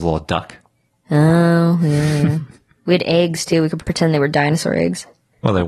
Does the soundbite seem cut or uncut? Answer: cut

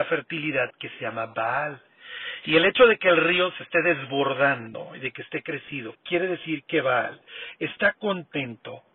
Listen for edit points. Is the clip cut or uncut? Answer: uncut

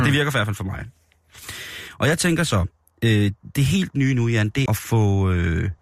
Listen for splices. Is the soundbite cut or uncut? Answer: cut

